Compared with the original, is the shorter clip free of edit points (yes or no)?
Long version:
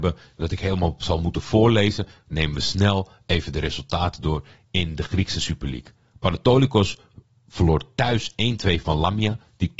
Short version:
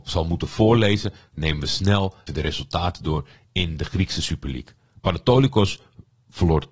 no